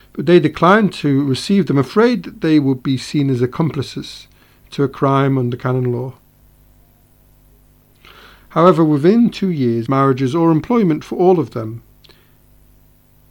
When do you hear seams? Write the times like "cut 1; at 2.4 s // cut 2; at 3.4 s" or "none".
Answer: cut 1; at 9.9 s